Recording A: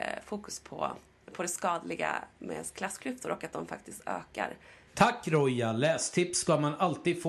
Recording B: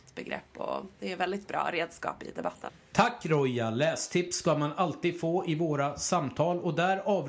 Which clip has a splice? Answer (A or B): A